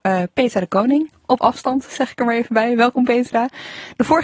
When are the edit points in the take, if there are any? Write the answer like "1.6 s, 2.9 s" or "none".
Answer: none